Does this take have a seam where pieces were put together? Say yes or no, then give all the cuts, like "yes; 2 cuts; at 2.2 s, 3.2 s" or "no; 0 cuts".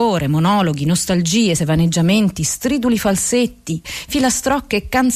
yes; 2 cuts; at 1.6 s, 3.8 s